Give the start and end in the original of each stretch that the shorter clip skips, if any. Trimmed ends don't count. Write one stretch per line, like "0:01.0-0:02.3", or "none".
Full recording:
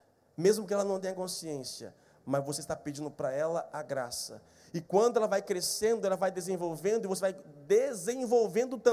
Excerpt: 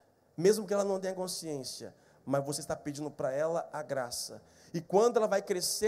none